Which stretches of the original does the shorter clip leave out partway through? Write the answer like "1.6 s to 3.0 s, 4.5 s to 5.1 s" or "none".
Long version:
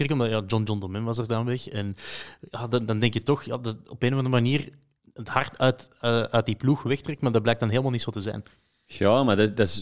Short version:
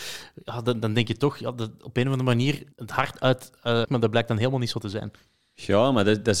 4.8 s to 5.1 s, 6.2 s to 7.2 s

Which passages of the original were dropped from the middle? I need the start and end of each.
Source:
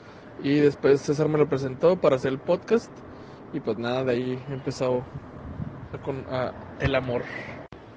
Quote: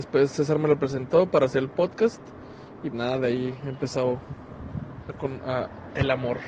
3.6 s to 3.8 s

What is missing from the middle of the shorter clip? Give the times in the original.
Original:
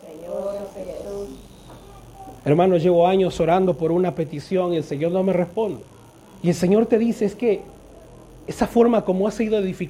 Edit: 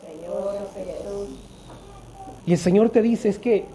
2.4 s to 6.4 s

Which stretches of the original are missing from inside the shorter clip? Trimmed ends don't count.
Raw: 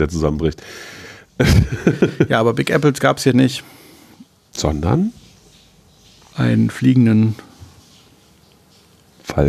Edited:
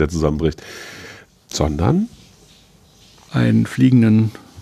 1.4 s to 4.4 s

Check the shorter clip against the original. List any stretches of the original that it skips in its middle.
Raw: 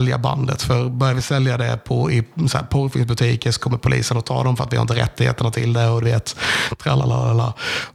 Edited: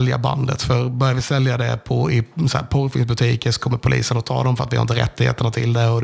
none

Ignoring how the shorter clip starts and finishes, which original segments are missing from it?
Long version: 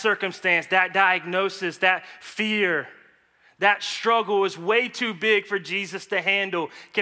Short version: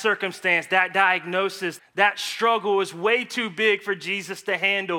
1.8 s to 3.4 s

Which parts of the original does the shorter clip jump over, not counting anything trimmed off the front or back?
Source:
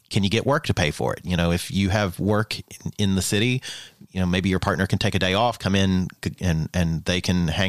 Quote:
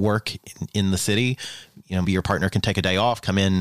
4.3 s to 4.4 s

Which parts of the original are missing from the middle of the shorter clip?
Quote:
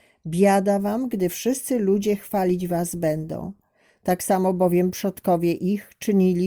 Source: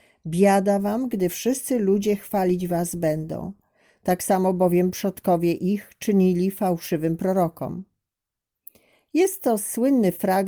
none

